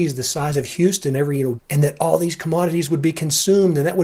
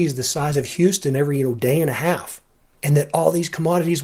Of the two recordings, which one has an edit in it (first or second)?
first